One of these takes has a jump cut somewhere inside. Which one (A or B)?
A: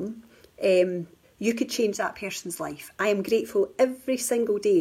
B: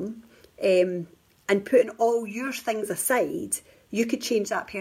A